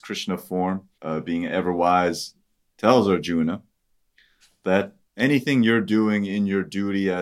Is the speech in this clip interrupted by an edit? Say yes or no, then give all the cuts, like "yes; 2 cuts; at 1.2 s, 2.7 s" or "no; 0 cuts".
yes; 1 cut; at 0.9 s